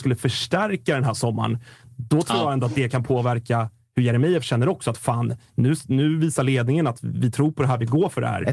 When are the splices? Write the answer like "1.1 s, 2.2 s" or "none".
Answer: none